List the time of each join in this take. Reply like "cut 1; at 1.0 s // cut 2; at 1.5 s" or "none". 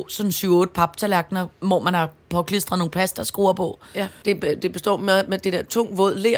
cut 1; at 4.2 s